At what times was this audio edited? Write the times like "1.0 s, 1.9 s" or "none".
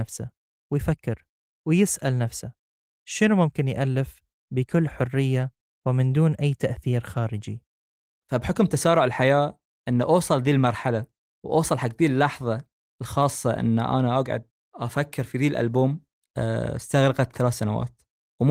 none